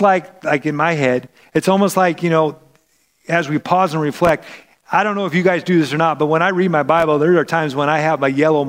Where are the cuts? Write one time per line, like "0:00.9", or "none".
none